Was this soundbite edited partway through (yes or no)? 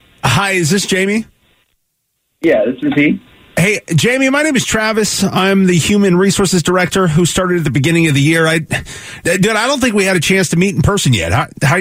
no